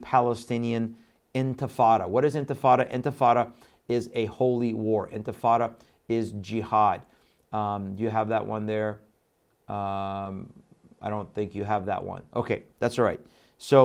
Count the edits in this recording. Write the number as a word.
zero